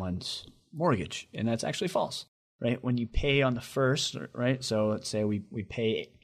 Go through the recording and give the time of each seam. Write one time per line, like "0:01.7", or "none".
none

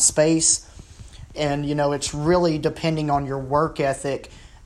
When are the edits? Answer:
0:01.3

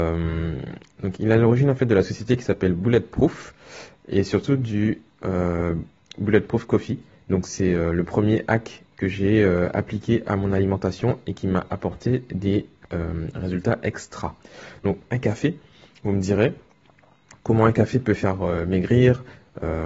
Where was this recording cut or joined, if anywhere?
none

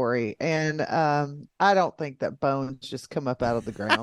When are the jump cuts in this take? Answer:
none

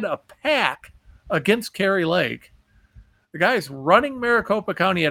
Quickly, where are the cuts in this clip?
none

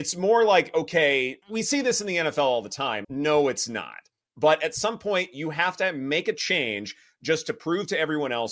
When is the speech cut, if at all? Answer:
0:01.4
0:03.0

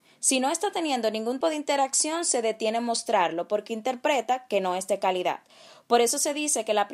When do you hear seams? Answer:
0:01.4

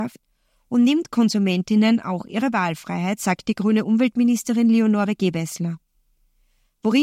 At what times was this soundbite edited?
none

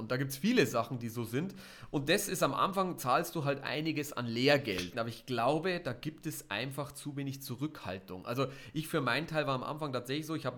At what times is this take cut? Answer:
0:04.9

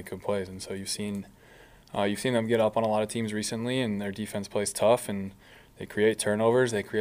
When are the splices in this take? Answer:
none

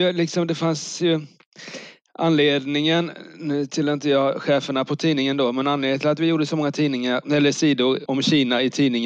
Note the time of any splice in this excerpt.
0:08.1

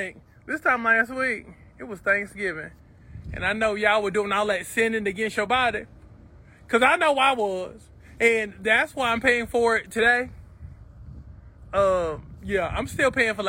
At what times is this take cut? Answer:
none

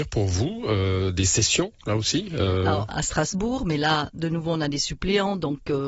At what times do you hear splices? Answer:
0:02.9

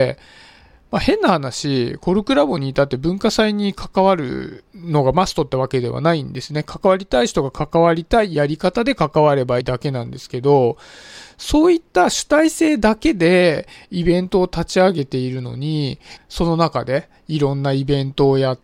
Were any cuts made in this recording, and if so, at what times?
0:09.6
0:16.2

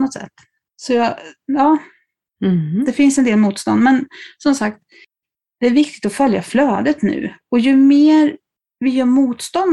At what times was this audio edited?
none

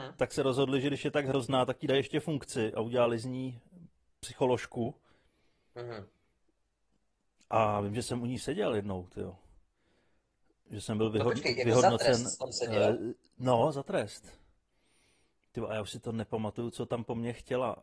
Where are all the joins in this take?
none

